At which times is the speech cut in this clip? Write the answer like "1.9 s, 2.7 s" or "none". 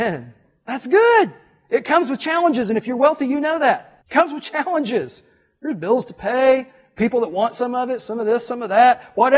4.0 s